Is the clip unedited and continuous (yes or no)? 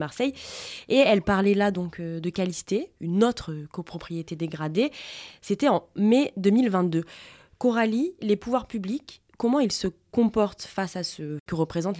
yes